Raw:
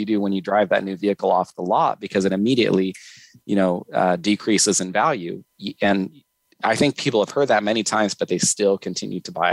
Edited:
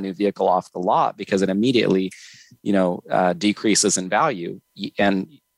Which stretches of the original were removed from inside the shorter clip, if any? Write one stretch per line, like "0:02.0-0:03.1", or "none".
none